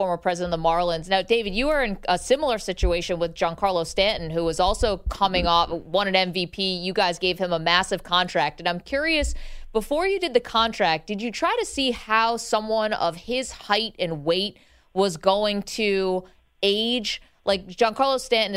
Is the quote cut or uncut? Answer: uncut